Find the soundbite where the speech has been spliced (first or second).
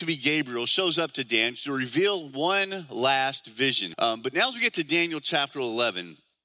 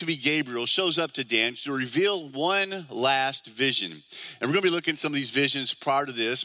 first